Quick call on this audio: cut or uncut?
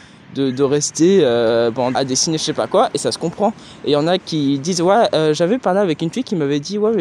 cut